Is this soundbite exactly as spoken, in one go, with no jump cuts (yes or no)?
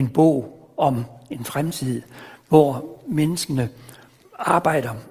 yes